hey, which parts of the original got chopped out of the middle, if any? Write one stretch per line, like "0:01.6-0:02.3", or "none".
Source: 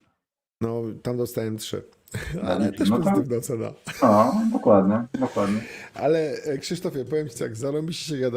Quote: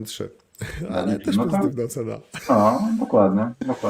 none